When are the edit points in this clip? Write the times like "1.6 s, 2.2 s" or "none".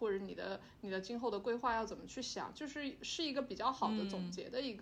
none